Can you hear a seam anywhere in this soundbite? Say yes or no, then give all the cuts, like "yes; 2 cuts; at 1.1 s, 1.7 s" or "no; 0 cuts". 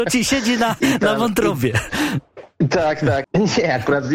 yes; 1 cut; at 3.2 s